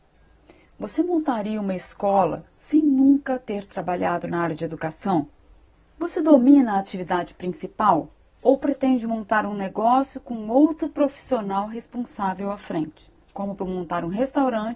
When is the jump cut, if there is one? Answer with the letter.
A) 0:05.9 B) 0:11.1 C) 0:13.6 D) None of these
C